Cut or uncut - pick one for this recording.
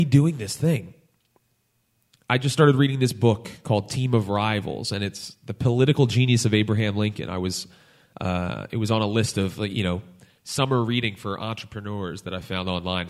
uncut